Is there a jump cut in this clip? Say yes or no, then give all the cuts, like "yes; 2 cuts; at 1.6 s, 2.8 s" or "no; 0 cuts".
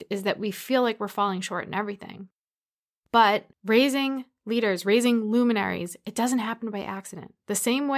yes; 1 cut; at 3.5 s